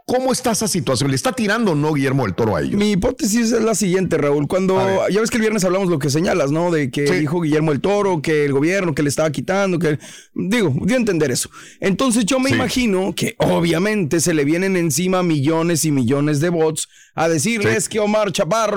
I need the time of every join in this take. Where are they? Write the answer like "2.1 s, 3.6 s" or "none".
none